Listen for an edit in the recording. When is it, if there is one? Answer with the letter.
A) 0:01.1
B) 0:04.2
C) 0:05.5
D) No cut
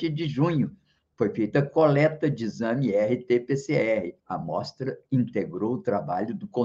B